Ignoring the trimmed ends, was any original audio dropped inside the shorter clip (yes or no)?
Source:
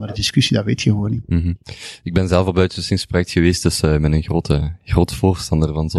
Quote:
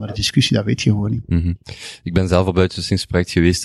no